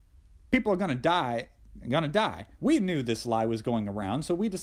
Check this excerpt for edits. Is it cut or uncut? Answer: cut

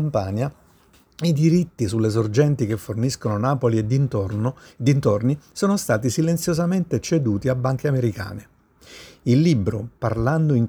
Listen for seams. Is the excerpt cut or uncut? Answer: uncut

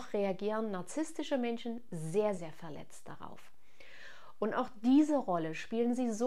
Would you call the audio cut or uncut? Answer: cut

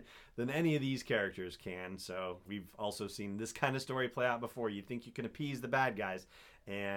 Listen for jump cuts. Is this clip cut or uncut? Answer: cut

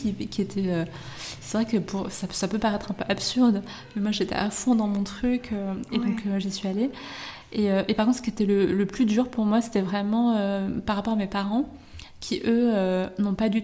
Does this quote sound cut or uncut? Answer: uncut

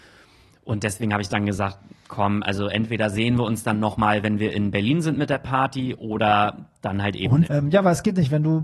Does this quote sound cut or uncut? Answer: cut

